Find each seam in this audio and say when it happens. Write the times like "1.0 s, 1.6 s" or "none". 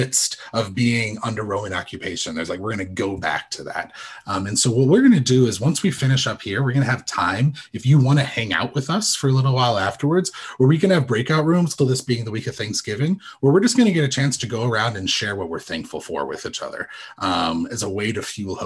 11.8 s